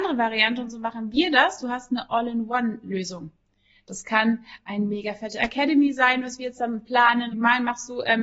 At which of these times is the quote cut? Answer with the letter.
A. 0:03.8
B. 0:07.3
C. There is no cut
B